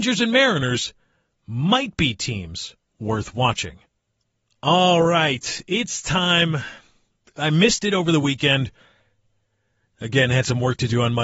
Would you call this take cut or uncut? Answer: uncut